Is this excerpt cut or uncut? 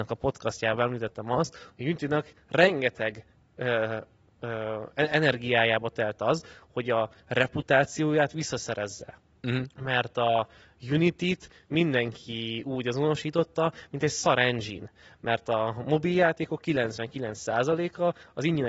uncut